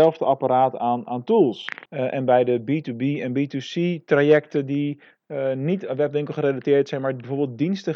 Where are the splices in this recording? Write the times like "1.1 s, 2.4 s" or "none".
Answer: 1.9 s